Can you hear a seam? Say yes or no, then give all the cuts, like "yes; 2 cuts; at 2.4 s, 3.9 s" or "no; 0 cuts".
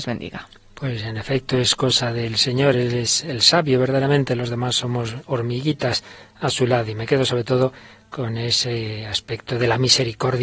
no; 0 cuts